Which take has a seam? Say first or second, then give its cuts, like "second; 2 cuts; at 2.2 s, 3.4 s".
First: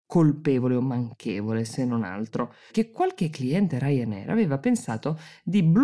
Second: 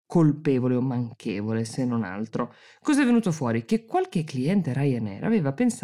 first; 1 cut; at 2.7 s